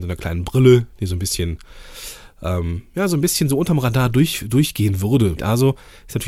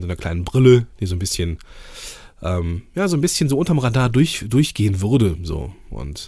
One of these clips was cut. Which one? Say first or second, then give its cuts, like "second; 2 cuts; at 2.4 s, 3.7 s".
first; 1 cut; at 5.4 s